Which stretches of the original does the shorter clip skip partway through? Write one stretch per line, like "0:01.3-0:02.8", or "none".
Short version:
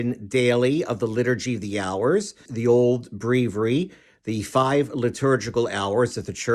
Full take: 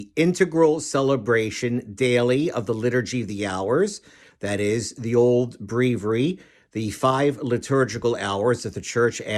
0:04.1-0:04.9

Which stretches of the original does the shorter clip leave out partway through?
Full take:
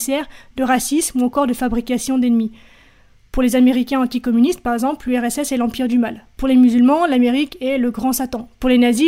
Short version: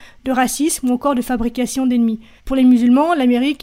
0:02.7-0:06.3

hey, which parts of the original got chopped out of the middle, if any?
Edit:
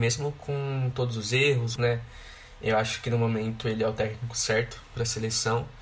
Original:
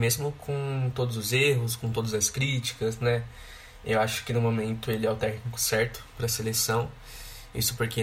0:01.8-0:03.0

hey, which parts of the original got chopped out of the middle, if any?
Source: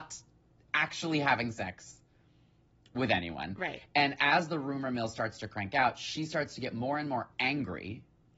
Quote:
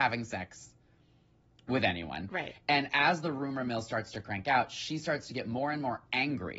none

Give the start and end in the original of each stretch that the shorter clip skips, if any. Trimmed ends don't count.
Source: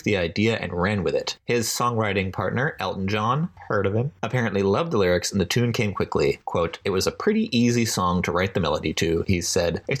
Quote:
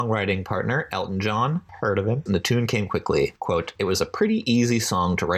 0:04.1-0:05.3

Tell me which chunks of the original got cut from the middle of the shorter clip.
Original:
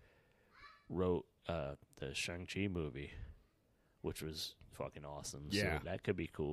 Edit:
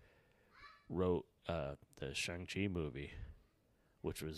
none

